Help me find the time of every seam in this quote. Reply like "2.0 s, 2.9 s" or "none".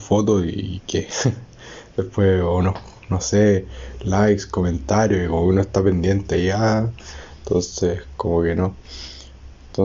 none